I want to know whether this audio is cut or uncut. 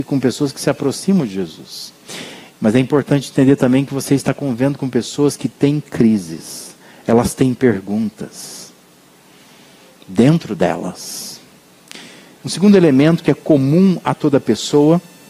cut